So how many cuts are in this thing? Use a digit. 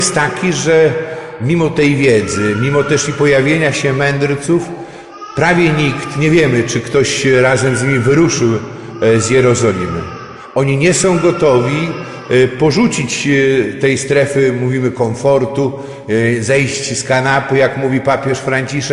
0